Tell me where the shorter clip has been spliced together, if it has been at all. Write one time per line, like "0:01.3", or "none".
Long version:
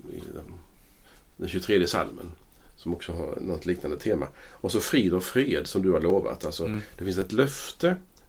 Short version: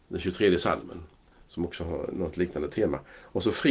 none